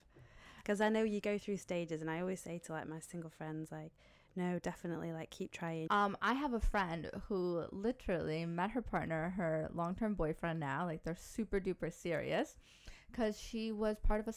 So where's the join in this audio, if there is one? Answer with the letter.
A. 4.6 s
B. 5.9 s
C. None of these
B